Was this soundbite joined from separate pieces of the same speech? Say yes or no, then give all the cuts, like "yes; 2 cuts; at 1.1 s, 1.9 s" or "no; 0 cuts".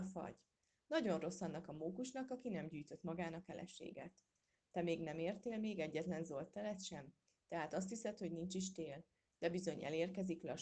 no; 0 cuts